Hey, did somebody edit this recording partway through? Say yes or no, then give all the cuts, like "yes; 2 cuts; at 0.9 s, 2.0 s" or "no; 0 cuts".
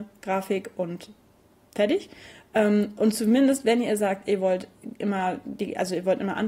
no; 0 cuts